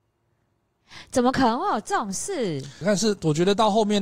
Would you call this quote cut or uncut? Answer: cut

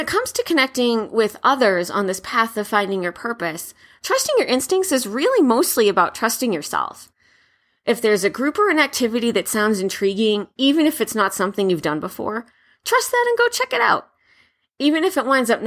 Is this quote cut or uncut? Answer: uncut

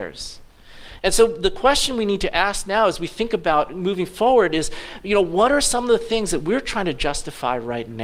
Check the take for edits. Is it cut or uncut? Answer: uncut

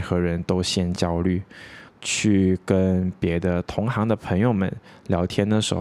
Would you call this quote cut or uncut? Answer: cut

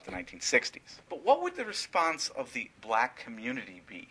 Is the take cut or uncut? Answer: cut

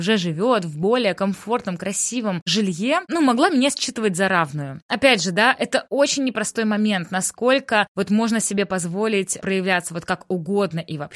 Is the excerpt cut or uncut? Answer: uncut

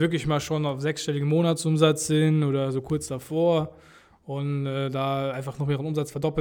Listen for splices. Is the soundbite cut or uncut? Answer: uncut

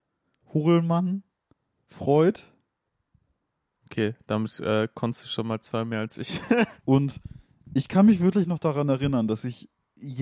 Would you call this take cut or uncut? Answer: cut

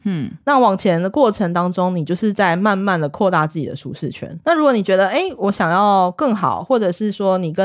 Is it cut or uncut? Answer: cut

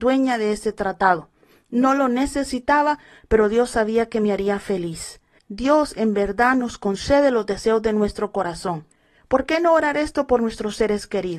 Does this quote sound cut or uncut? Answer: cut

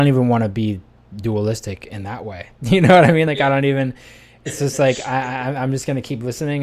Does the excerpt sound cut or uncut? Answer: uncut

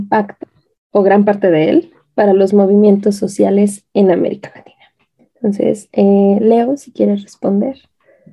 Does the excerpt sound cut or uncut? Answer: uncut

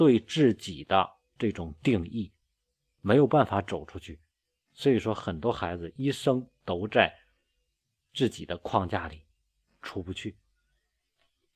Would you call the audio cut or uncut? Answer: uncut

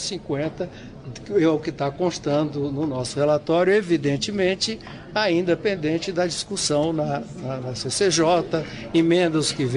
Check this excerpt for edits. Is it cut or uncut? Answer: uncut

